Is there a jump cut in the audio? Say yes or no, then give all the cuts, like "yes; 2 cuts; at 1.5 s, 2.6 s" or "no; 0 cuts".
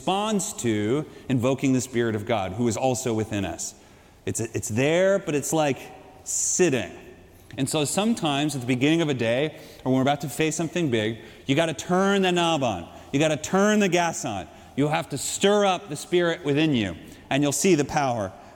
no; 0 cuts